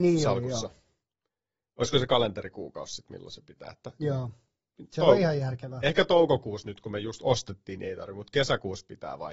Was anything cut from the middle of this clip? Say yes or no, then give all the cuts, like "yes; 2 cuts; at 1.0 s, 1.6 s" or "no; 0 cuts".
no; 0 cuts